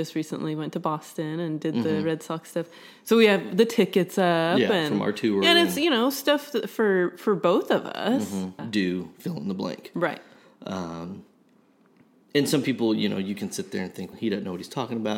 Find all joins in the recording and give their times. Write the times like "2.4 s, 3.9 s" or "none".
8.6 s, 14.1 s